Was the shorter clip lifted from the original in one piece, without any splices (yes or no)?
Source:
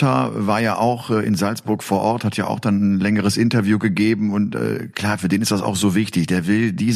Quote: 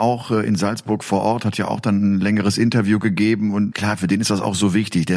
no